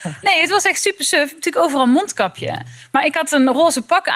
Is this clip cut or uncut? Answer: uncut